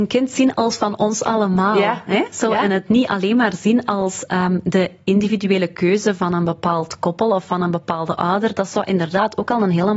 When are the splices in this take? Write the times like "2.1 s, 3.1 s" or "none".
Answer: none